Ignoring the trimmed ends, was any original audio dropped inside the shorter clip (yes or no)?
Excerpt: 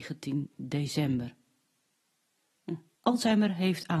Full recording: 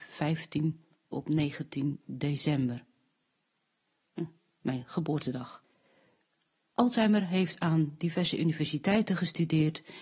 yes